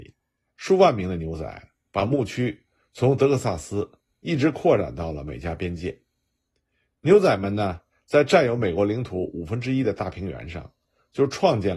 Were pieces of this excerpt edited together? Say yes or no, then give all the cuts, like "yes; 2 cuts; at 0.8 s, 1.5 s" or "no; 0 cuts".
yes; 1 cut; at 7.9 s